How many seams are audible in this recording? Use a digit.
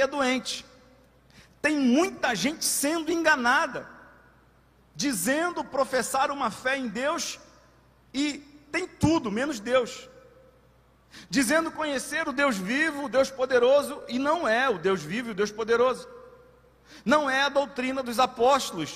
0